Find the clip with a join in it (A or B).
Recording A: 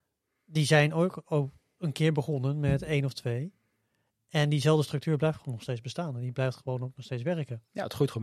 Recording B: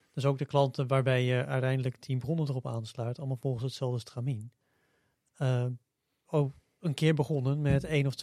B